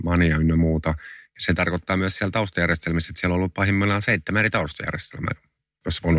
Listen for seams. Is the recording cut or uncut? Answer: uncut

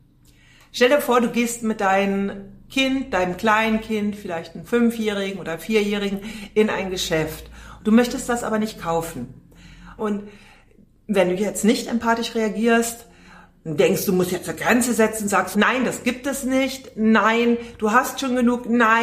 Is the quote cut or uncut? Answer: cut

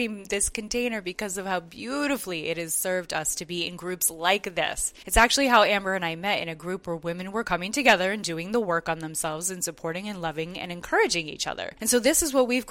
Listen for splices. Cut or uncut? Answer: uncut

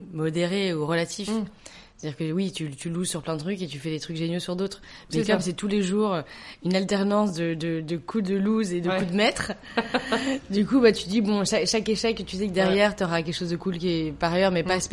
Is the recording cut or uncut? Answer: uncut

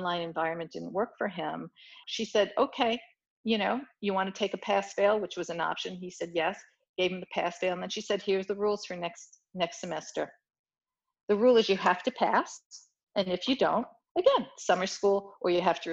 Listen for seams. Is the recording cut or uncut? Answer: cut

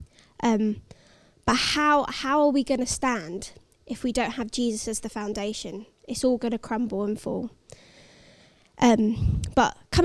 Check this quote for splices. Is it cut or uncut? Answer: uncut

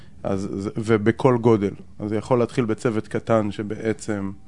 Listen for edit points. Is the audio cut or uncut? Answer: uncut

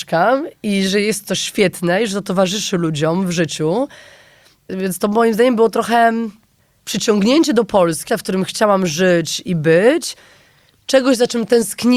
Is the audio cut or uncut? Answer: cut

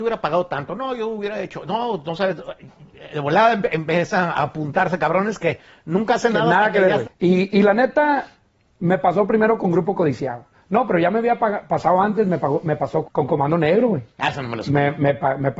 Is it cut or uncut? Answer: cut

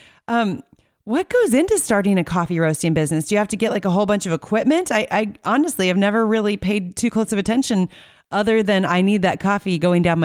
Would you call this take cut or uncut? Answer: uncut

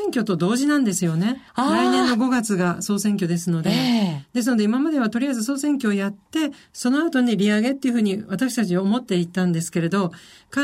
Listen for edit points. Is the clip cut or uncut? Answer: cut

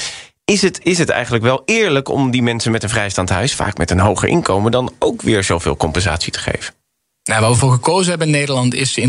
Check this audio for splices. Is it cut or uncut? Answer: uncut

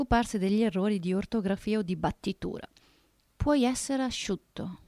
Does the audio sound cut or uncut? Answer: uncut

